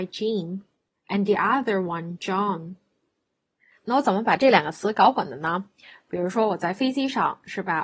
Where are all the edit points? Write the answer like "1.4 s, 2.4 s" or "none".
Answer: none